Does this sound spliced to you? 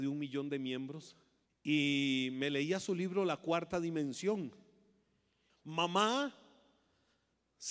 yes; 2 cuts; at 1.5 s, 5.5 s

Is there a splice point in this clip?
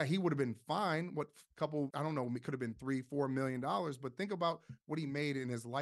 yes; 1 cut; at 1.9 s

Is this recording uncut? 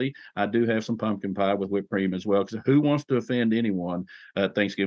yes; 0 cuts

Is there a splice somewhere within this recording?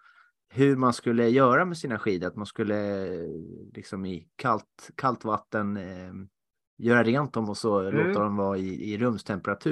no; 0 cuts

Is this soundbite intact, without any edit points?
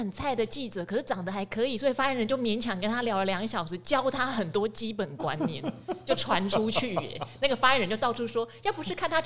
yes; 0 cuts

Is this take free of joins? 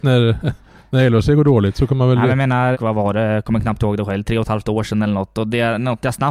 no; 1 cut; at 2.7 s

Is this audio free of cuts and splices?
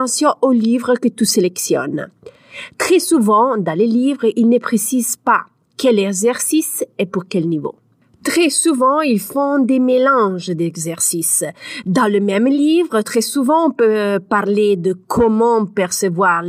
yes; 0 cuts

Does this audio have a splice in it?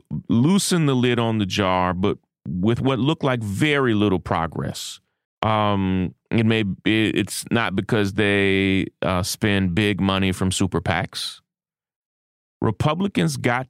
yes; 1 cut; at 5.2 s

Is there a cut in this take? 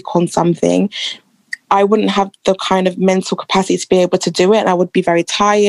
no; 0 cuts

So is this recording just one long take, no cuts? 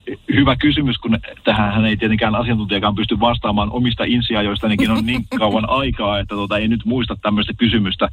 yes; 0 cuts

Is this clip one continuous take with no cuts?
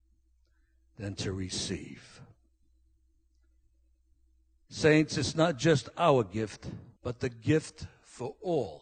no; 1 cut; at 7.0 s

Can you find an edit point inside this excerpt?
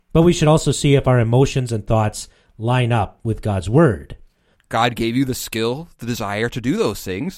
yes; 1 cut; at 4.5 s

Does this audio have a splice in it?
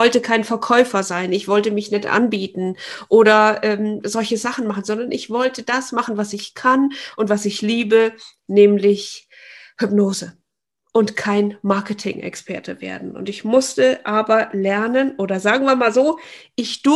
no; 0 cuts

